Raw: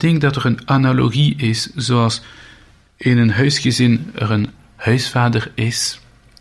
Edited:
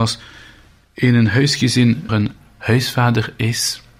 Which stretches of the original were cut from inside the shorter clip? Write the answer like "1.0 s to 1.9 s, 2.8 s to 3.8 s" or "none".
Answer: 4.1 s to 4.3 s

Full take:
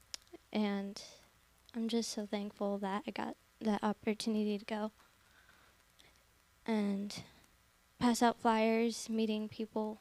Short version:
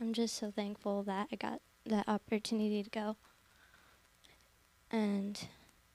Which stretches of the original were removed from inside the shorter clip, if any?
none

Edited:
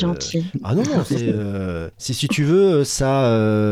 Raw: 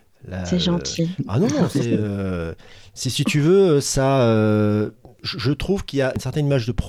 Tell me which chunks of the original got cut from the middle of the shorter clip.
2.6 s to 2.9 s

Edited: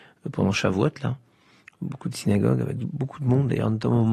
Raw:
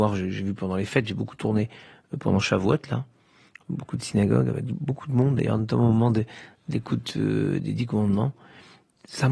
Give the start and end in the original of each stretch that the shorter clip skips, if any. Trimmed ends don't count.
none

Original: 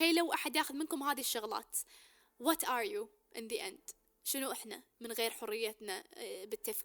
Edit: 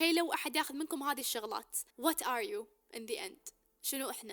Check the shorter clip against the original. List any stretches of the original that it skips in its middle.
1.9 s to 2.3 s

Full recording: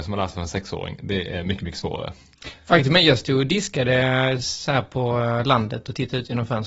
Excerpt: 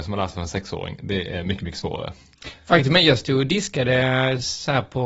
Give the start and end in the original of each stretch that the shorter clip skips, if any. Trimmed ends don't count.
none

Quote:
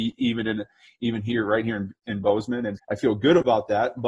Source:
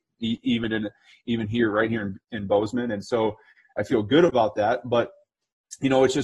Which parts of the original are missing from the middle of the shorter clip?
3.0 s to 3.7 s

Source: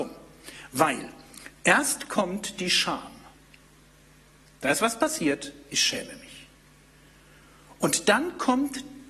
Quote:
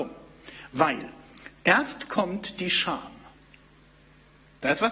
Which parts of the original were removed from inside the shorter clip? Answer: none

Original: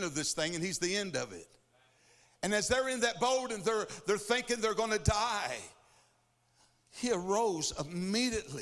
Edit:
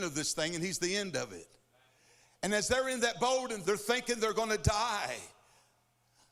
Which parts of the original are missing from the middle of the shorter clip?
3.6 s to 4.0 s

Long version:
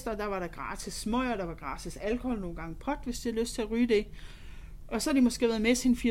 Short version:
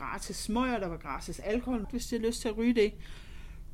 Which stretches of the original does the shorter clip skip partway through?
2.4 s to 3.0 s

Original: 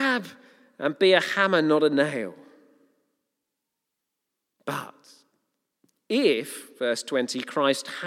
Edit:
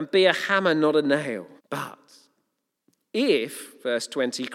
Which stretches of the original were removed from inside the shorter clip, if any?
2.4 s to 4.5 s

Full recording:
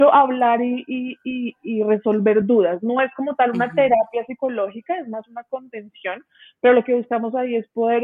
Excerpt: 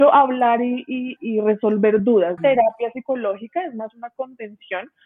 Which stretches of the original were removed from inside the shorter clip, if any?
1.2 s to 1.6 s, 2.8 s to 3.7 s

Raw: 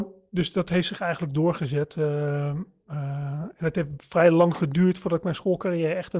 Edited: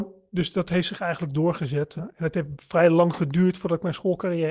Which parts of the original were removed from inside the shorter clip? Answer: 2.0 s to 3.4 s

